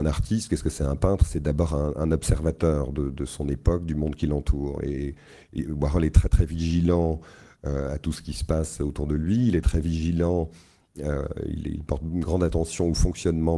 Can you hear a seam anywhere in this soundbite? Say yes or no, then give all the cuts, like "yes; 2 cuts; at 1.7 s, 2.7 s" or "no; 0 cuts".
no; 0 cuts